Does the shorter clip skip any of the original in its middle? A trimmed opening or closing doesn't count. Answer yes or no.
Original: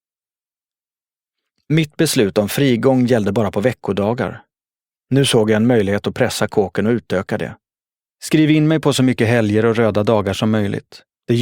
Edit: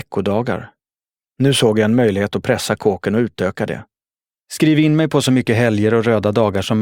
no